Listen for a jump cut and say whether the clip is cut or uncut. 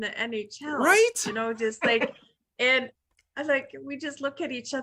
uncut